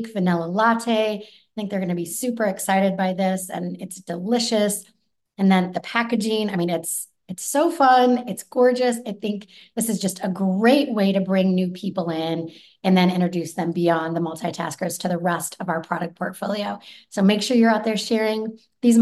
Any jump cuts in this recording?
no; 0 cuts

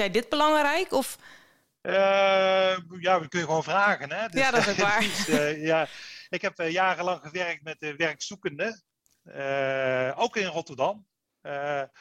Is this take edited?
no; 0 cuts

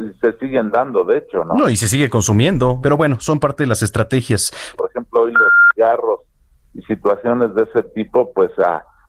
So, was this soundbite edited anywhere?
yes; 2 cuts; at 2.8 s, 4.8 s

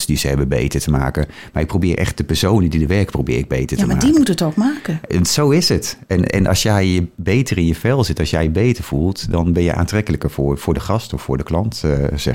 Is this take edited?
no; 0 cuts

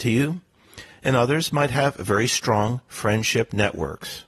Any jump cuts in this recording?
no; 0 cuts

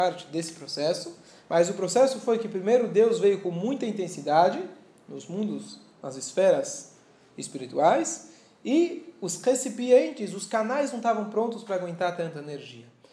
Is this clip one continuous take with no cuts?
yes; 0 cuts

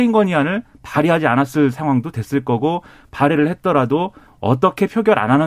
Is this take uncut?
yes; 0 cuts

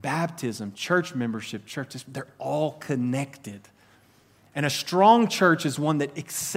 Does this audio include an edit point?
no; 0 cuts

